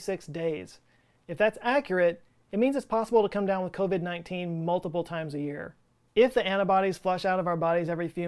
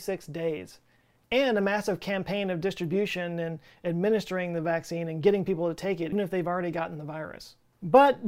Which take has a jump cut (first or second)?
second